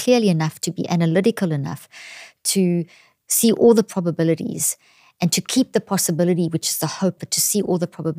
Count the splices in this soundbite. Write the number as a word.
one